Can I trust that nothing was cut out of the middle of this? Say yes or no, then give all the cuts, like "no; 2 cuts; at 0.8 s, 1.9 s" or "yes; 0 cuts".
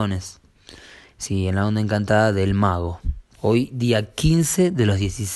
no; 1 cut; at 3.3 s